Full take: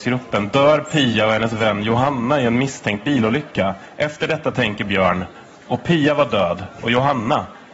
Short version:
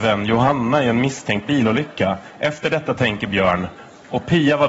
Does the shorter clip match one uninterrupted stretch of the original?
yes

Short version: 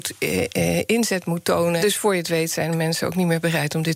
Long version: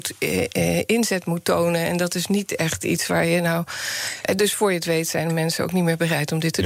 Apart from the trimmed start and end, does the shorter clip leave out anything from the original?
yes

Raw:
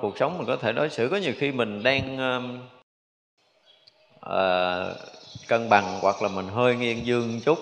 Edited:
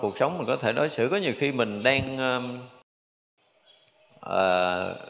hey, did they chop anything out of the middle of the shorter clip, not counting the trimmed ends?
no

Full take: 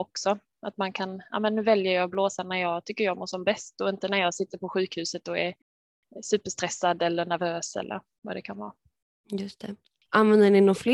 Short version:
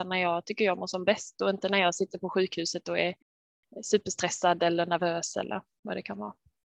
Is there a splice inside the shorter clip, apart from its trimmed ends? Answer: no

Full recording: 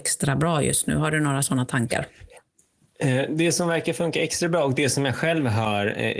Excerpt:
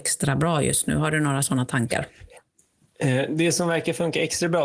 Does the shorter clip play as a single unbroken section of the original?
yes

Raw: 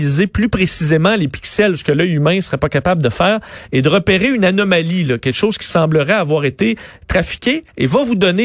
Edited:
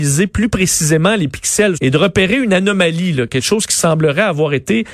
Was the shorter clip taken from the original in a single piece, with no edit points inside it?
no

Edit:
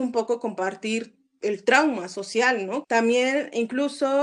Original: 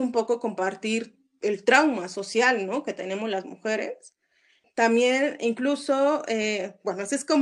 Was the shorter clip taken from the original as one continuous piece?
no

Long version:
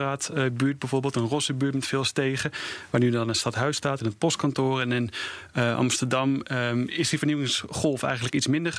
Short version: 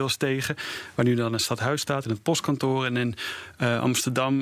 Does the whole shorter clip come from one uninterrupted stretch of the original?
yes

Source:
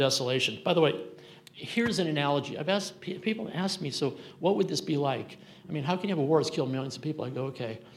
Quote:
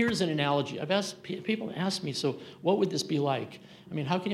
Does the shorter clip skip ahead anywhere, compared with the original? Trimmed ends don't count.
no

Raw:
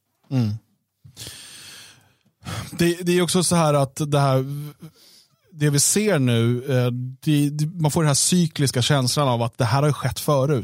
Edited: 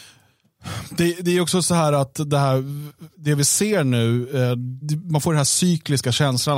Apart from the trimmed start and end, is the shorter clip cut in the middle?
yes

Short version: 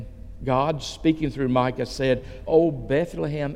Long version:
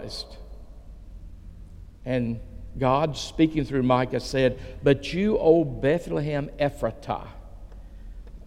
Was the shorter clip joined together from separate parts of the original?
yes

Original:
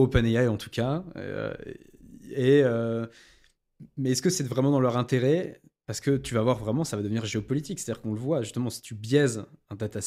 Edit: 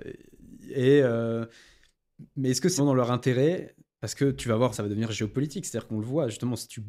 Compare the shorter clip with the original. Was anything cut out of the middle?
yes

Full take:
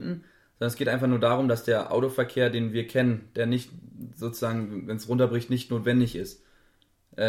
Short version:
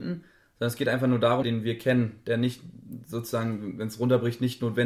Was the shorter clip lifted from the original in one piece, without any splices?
no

